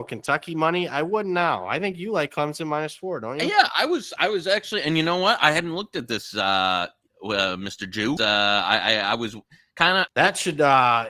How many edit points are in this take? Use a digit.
2